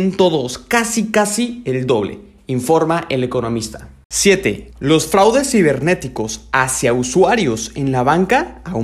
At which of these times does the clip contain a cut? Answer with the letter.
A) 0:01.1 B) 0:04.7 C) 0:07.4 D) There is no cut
B